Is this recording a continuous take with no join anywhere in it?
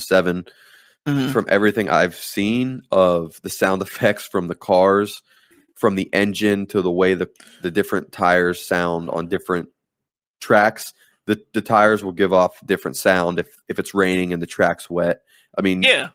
yes; 0 cuts

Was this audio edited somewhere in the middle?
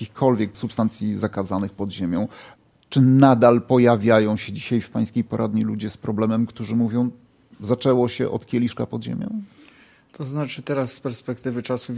no; 0 cuts

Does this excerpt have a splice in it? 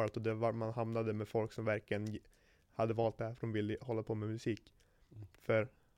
yes; 1 cut; at 2.7 s

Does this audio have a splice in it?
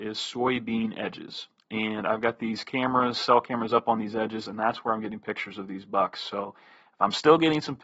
no; 0 cuts

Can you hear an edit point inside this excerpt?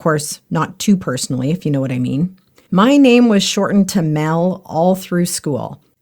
yes; 1 cut; at 2.7 s

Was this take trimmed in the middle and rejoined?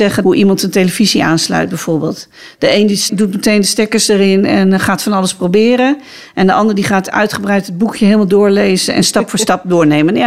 no; 0 cuts

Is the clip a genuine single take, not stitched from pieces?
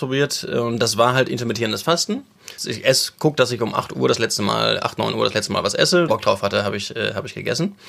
no; 2 cuts; at 2.6 s, 6.1 s

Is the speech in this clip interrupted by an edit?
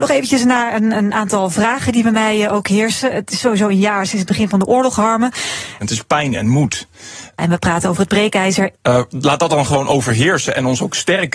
yes; 3 cuts; at 5.8 s, 7.4 s, 8.7 s

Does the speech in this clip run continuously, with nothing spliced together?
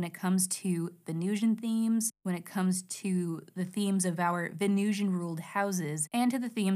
yes; 0 cuts

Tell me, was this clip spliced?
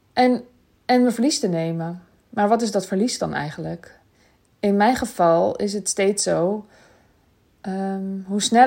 no; 0 cuts

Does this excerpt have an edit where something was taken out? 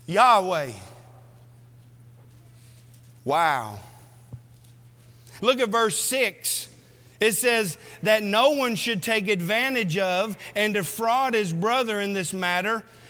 yes; 1 cut; at 5.4 s

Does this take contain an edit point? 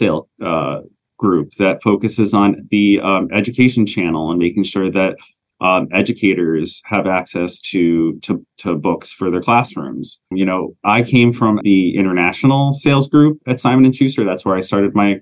yes; 2 cuts; at 10.3 s, 11.6 s

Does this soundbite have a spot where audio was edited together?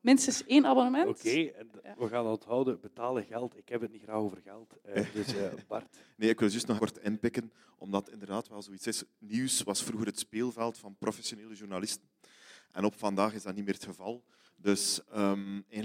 yes; 1 cut; at 6.8 s

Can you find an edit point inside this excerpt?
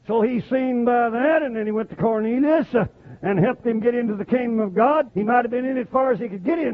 yes; 1 cut; at 5.1 s

